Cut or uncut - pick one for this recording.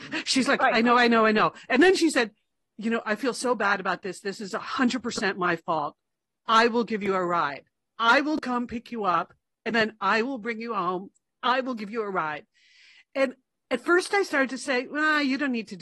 uncut